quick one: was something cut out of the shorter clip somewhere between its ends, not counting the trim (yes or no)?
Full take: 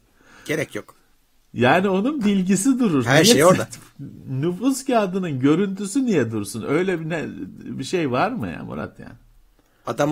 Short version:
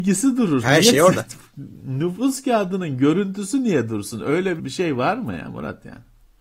yes